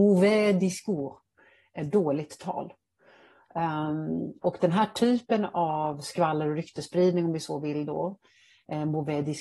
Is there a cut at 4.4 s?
yes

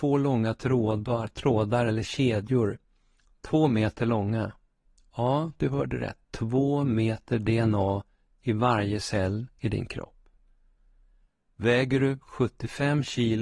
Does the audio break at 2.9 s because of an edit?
no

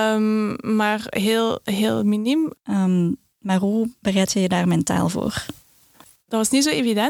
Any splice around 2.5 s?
yes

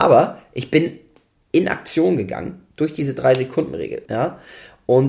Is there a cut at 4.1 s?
yes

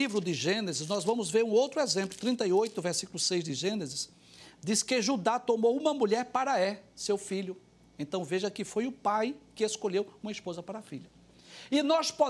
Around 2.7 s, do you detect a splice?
no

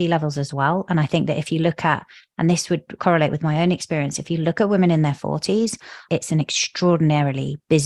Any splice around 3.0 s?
yes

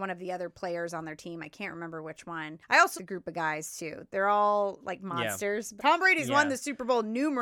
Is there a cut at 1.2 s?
no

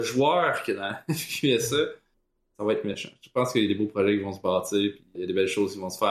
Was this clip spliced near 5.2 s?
yes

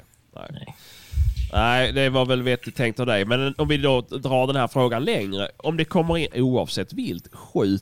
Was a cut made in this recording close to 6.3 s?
yes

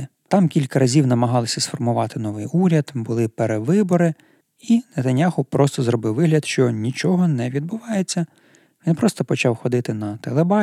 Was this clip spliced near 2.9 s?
no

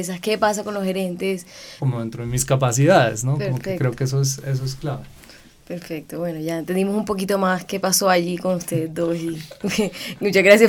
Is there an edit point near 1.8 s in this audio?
yes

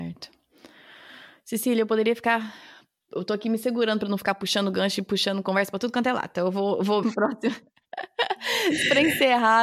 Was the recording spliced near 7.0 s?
yes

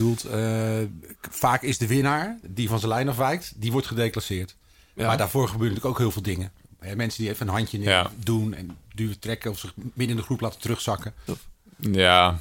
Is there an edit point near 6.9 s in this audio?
no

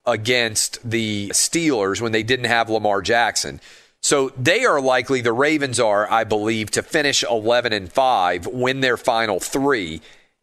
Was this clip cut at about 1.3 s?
yes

